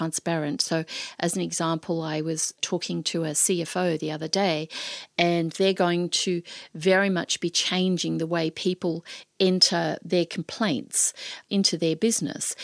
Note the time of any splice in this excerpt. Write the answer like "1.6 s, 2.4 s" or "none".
none